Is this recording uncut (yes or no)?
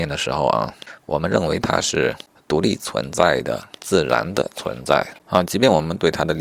no